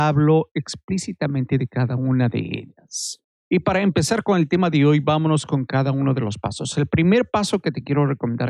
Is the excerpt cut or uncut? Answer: uncut